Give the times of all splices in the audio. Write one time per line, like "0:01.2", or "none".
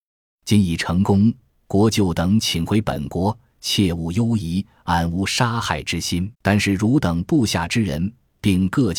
0:06.3